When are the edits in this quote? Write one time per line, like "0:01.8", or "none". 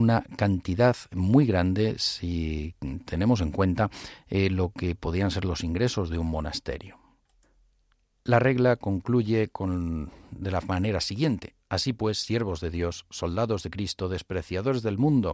none

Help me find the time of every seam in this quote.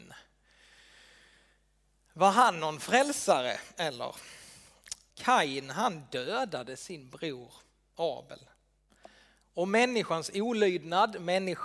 0:05.1

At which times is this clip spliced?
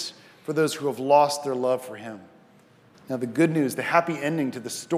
0:02.9

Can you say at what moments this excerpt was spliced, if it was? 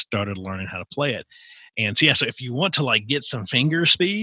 none

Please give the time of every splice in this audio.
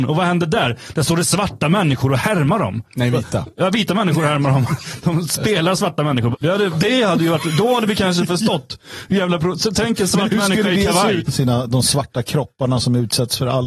0:06.3
0:11.2

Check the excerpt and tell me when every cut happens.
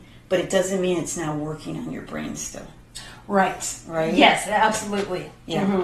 none

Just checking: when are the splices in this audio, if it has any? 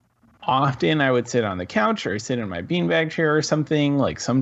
none

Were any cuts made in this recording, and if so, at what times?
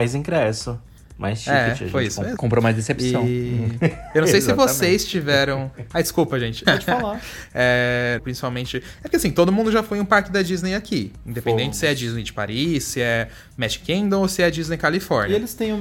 0:02.4
0:06.6
0:08.2

